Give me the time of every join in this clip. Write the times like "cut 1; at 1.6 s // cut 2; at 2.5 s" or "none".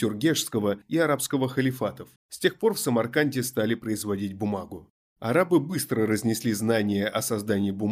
cut 1; at 2.2 s